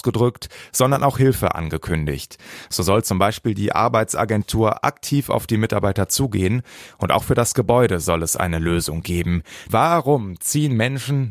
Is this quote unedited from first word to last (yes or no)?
no